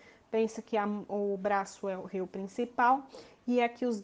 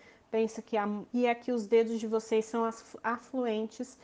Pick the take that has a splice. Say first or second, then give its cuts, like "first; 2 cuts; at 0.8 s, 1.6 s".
second; 1 cut; at 1.1 s